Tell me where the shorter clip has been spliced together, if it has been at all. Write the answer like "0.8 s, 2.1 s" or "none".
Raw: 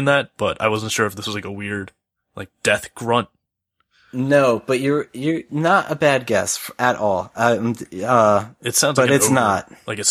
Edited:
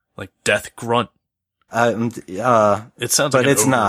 1.7 s